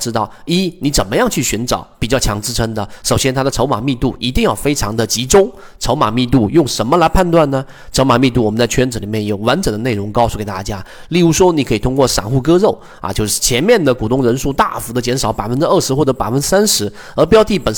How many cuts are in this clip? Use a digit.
0